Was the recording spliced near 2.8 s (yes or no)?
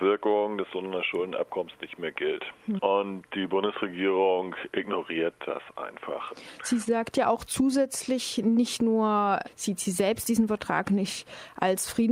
yes